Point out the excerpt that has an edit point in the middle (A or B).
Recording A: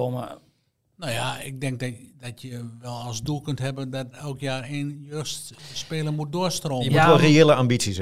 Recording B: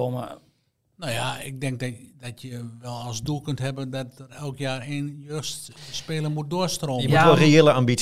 A